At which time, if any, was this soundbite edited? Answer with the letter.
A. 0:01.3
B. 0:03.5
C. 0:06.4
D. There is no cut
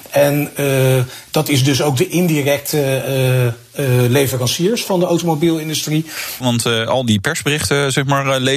C